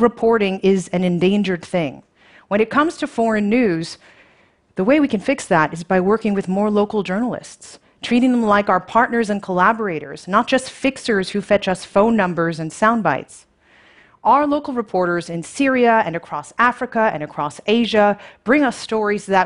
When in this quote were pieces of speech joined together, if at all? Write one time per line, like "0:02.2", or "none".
none